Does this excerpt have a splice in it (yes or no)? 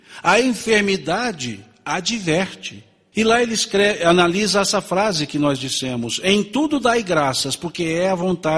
yes